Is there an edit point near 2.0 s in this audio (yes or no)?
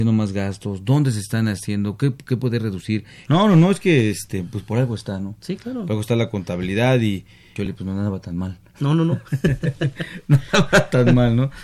no